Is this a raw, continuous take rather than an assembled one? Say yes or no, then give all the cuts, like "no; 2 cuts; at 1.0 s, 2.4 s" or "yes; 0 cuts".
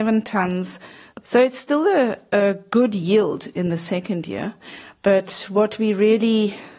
no; 1 cut; at 1.2 s